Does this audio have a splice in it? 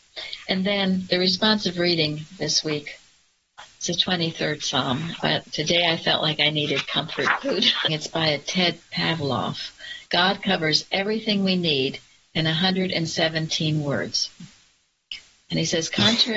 yes; 3 cuts; at 5.2 s, 7.9 s, 10.1 s

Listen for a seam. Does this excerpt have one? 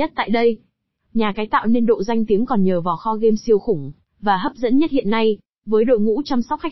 yes; 2 cuts; at 1.1 s, 5.6 s

